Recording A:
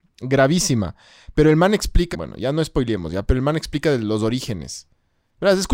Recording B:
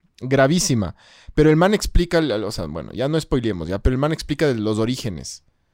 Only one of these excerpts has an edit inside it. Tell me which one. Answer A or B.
A